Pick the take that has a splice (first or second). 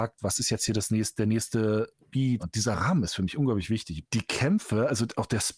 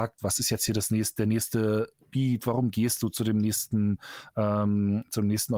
first